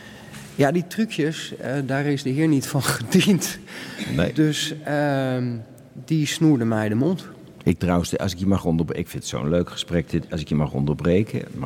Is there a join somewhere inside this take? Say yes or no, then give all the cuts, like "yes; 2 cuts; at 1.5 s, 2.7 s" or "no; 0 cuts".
no; 0 cuts